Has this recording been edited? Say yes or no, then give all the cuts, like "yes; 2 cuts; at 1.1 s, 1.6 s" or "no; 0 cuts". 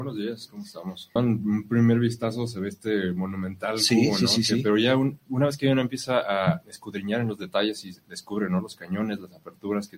yes; 1 cut; at 1.2 s